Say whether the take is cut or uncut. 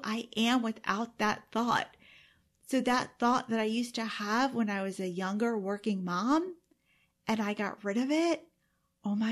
uncut